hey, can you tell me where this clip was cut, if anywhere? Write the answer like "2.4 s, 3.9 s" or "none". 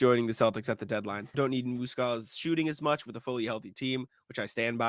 1.3 s